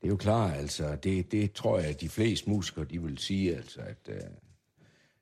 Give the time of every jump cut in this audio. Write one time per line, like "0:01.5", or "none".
none